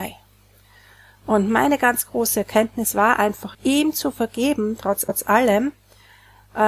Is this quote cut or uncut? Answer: cut